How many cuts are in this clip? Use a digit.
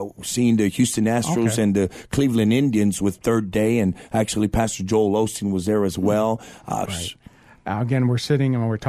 1